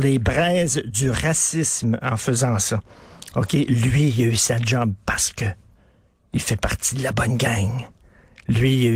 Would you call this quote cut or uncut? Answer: uncut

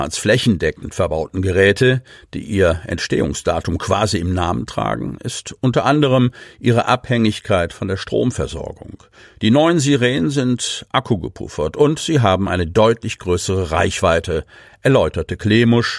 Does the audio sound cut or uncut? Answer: uncut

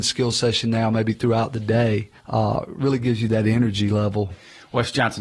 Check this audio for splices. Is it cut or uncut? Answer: cut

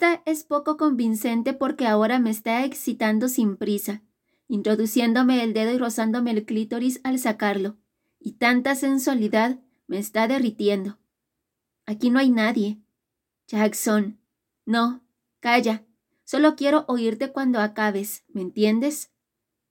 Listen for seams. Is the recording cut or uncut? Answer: uncut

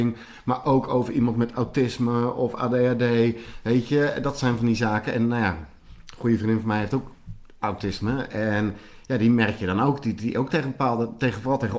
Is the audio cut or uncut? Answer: uncut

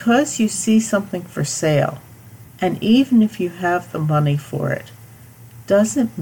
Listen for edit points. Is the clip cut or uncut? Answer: uncut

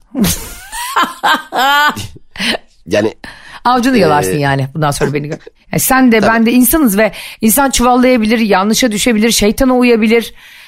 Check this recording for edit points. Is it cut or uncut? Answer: cut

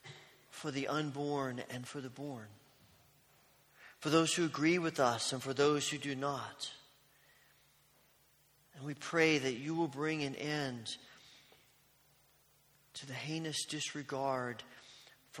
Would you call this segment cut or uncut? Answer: uncut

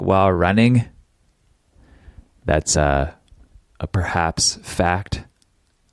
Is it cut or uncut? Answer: uncut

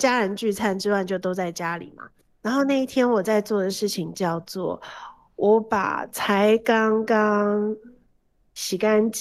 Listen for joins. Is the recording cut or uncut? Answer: uncut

